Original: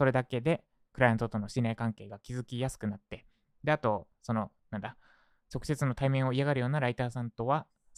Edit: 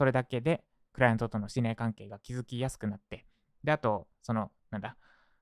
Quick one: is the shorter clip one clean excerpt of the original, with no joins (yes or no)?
yes